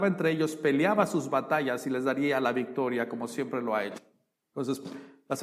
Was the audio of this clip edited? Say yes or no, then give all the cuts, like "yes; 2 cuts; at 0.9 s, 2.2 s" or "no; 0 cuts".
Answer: yes; 1 cut; at 4.3 s